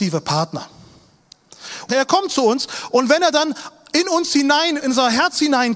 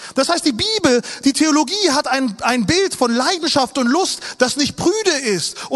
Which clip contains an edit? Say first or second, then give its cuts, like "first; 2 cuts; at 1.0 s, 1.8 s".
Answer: first; 2 cuts; at 1.9 s, 4.8 s